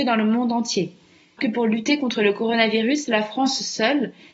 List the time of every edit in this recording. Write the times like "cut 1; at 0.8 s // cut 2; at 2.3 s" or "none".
cut 1; at 1.4 s